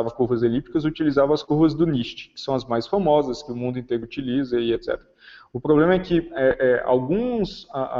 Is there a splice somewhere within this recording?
no; 0 cuts

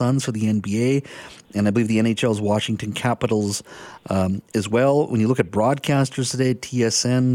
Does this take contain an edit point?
no; 0 cuts

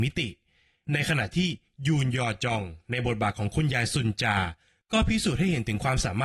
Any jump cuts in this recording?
no; 0 cuts

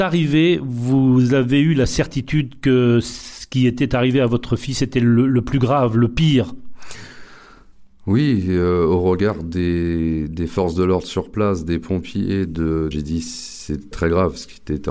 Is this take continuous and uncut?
no; 2 cuts; at 12.9 s, 13.9 s

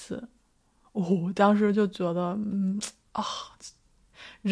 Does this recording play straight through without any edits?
yes; 0 cuts

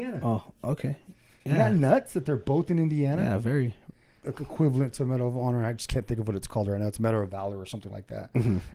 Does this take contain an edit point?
yes; 1 cut; at 4.2 s

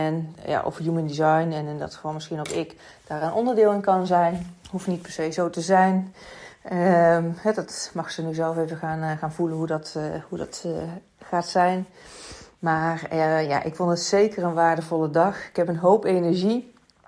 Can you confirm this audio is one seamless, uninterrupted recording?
yes; 0 cuts

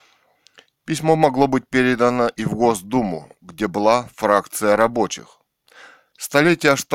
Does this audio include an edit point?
no; 0 cuts

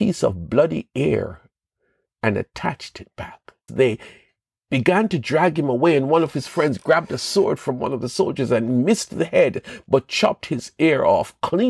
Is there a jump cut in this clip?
yes; 1 cut; at 3.7 s

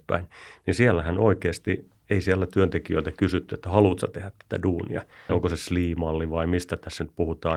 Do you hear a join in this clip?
yes; 1 cut; at 5.3 s

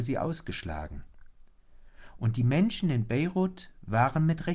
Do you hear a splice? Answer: no; 0 cuts

